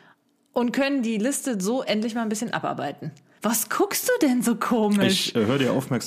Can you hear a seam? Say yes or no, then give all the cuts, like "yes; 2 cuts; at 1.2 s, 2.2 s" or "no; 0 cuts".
no; 0 cuts